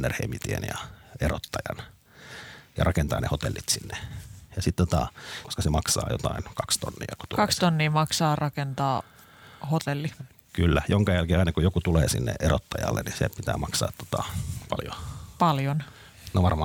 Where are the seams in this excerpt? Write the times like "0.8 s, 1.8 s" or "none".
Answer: 5.4 s